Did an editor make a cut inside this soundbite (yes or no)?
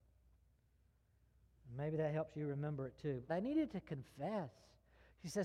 yes